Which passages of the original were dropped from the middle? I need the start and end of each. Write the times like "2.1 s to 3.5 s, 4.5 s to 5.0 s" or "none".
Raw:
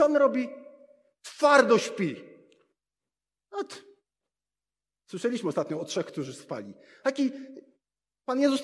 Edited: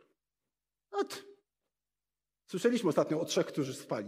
none